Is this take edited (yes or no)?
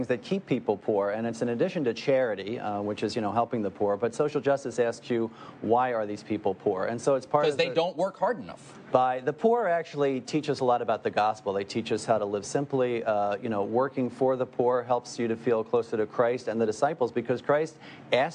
yes